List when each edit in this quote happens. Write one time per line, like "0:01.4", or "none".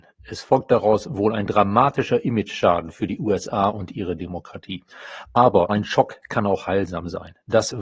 0:05.7

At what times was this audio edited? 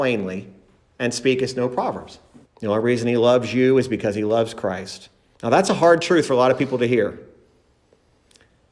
0:02.4
0:05.3

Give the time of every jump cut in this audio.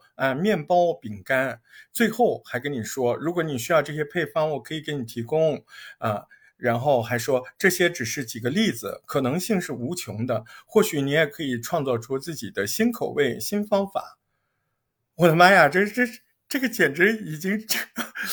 none

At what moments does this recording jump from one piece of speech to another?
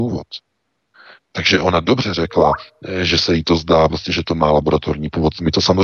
none

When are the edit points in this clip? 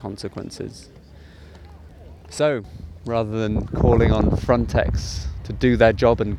none

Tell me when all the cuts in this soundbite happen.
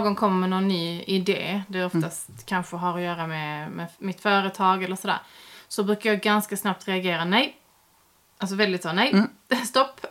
none

